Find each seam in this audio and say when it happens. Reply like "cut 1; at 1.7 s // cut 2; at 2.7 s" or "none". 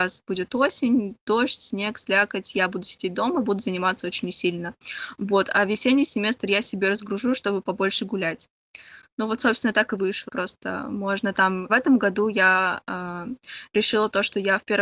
cut 1; at 10.3 s // cut 2; at 11.7 s

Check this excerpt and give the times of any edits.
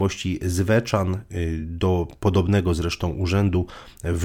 none

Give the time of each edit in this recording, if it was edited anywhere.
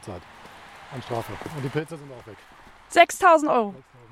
none

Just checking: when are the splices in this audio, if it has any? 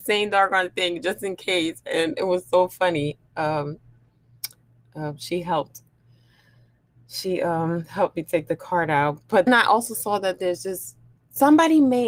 cut 1; at 9.5 s

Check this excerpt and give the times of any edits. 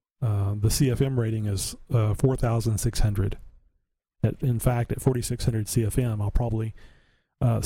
cut 1; at 4.1 s

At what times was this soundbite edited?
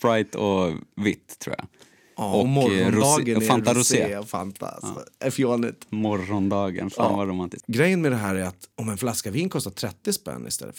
cut 1; at 8.7 s

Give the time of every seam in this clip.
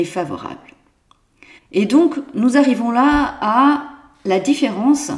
cut 1; at 1.6 s

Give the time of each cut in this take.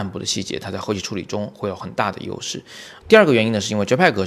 cut 1; at 3.0 s

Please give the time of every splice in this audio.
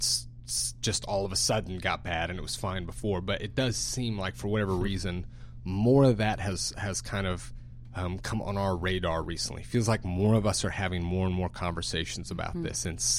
none

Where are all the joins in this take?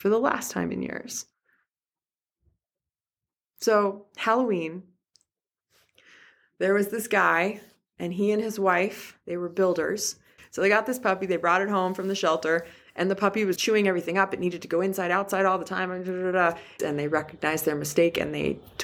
cut 1; at 10.4 s // cut 2; at 13.6 s // cut 3; at 16.8 s

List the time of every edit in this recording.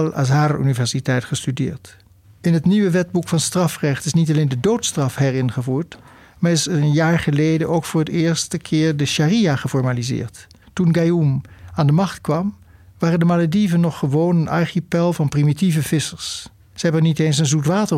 cut 1; at 2.2 s // cut 2; at 10.6 s // cut 3; at 16.7 s

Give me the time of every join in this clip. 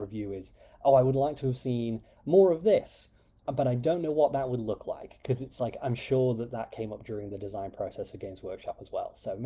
none

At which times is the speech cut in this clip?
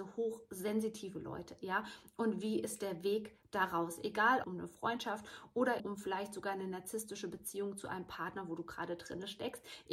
cut 1; at 4.4 s // cut 2; at 5.8 s

